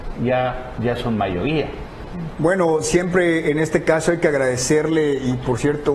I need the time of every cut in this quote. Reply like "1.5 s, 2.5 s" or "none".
2.3 s